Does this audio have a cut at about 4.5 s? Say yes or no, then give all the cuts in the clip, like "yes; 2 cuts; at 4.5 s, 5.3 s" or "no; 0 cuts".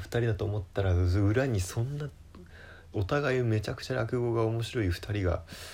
no; 1 cut; at 2.9 s